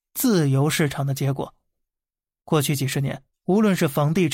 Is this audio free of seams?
yes; 0 cuts

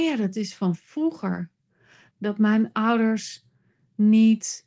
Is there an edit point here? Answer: yes; 1 cut; at 2.1 s

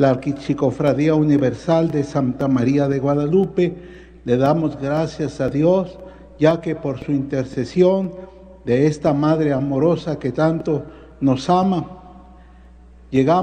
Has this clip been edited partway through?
no; 0 cuts

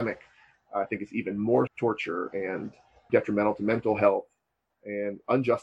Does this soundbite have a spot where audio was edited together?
yes; 2 cuts; at 1.7 s, 3.1 s

